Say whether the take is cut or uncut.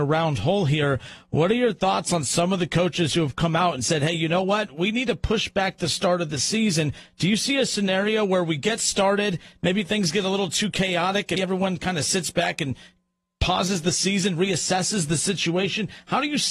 cut